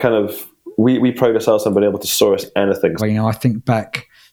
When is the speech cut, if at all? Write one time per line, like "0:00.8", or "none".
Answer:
0:03.0